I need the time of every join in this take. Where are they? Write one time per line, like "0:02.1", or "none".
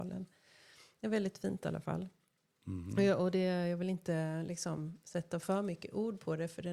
none